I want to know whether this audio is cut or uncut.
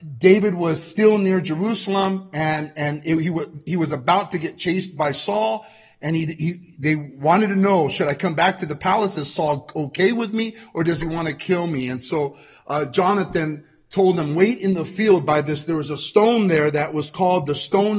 uncut